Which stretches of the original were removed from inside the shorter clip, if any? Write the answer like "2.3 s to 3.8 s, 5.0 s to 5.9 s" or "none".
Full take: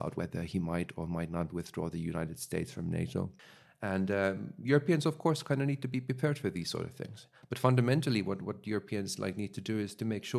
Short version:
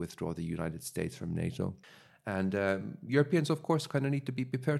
none